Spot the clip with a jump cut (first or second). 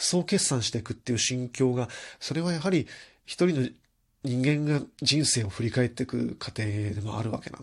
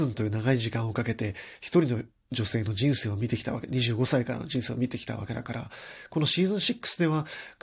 first